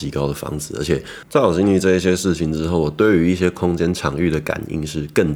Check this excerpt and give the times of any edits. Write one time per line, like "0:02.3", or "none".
none